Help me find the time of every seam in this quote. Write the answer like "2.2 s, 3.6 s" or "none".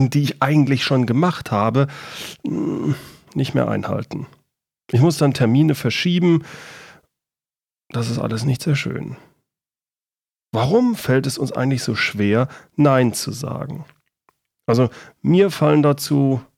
none

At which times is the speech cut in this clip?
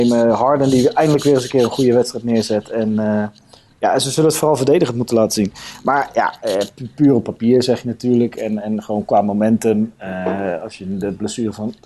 6.9 s

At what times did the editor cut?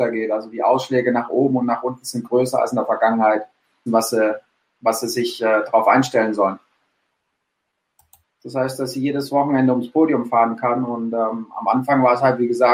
3.9 s, 8.2 s

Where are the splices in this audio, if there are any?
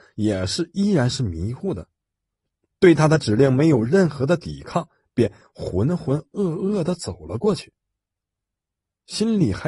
none

